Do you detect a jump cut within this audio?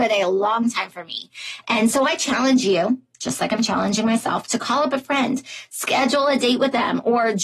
no; 0 cuts

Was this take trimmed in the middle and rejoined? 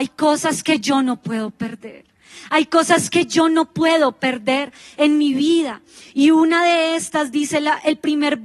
no; 0 cuts

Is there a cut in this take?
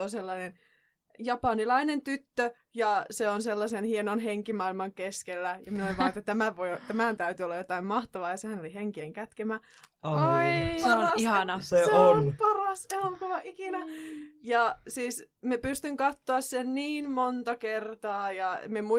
no; 0 cuts

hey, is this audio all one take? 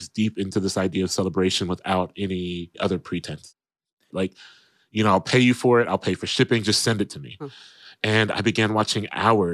no; 1 cut; at 4.1 s

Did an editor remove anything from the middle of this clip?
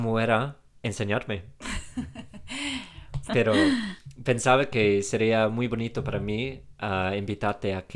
yes; 1 cut; at 3.3 s

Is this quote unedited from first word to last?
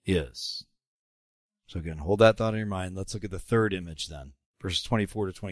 yes; 0 cuts

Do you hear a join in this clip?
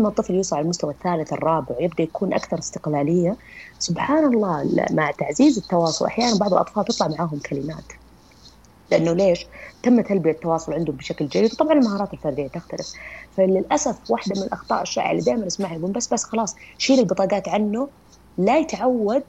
no; 0 cuts

